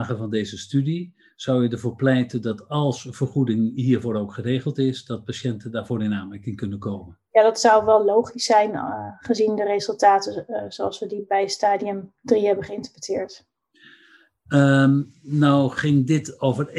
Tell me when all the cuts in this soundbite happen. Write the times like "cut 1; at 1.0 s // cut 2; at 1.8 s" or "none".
none